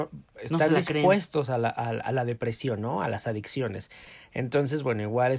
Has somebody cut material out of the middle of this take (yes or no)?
no